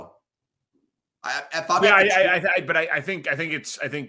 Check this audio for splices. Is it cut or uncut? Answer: uncut